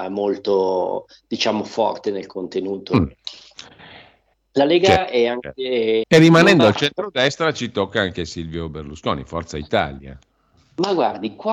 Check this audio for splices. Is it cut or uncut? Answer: cut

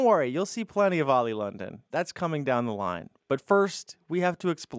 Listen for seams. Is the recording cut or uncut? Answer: uncut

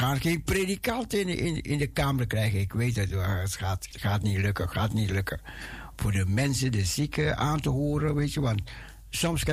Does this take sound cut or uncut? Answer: cut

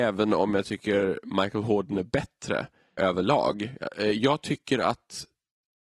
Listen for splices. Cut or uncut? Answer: cut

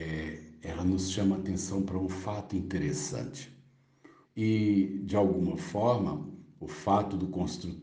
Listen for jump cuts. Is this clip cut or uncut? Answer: cut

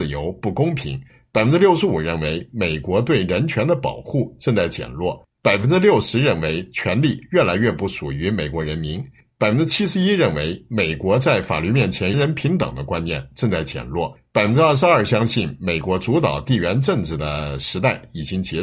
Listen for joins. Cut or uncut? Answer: cut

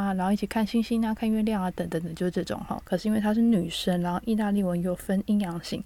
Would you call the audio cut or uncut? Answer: cut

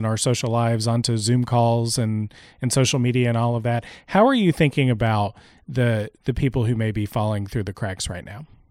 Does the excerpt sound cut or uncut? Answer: uncut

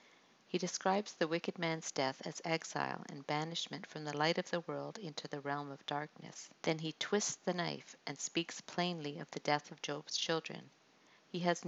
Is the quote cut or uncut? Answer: cut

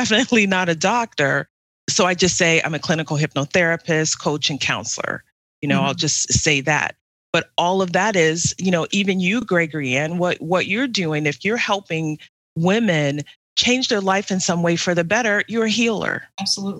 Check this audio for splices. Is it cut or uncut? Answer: uncut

